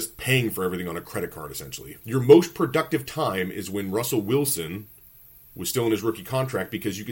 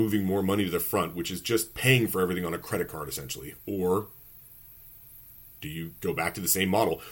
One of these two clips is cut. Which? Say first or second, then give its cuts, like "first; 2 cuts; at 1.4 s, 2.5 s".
first; 1 cut; at 2.0 s